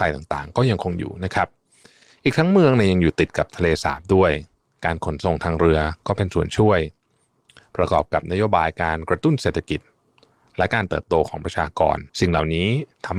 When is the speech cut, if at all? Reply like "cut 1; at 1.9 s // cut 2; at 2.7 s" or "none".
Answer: cut 1; at 12.1 s